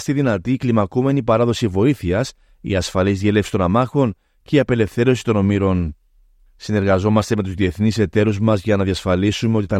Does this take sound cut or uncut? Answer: uncut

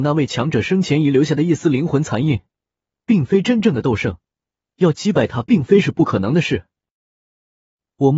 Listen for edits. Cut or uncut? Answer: uncut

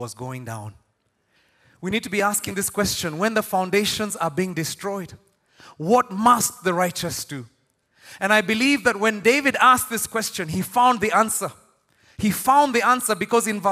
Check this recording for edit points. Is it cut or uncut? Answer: uncut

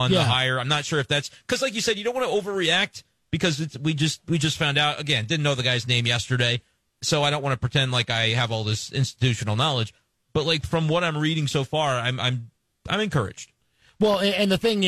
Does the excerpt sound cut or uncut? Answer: uncut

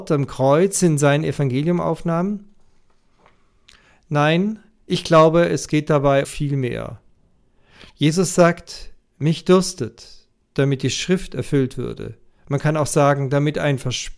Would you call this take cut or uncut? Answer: cut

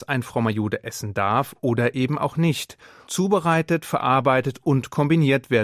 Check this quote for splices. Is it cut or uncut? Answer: cut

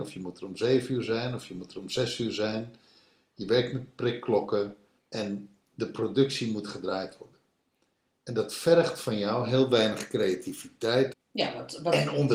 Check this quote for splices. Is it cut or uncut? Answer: cut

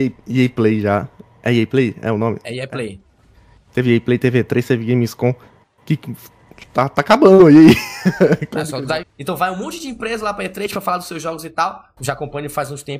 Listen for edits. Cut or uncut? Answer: cut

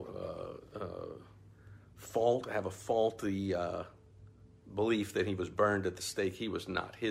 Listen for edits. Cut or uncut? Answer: uncut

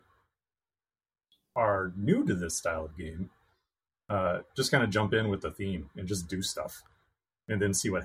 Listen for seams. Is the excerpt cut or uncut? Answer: uncut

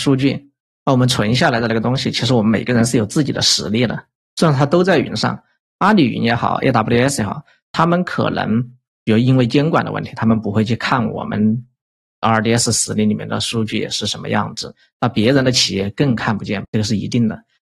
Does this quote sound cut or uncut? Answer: cut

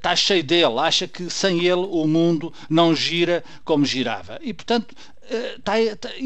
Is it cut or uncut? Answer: uncut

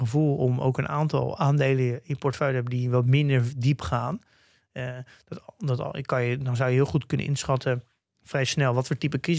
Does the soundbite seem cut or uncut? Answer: uncut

